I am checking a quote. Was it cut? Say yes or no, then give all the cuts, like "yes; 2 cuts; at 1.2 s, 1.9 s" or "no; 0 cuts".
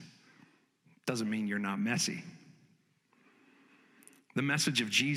no; 0 cuts